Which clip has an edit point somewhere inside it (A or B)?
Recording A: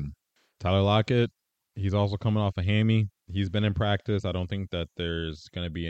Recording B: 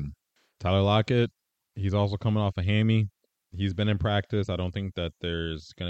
A